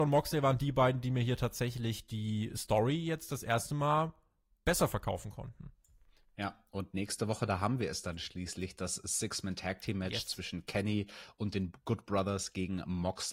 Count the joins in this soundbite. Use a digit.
0